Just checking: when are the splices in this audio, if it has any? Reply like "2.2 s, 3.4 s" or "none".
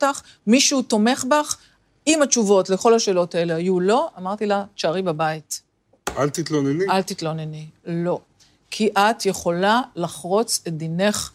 none